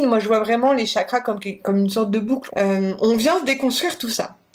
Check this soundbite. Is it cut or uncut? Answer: cut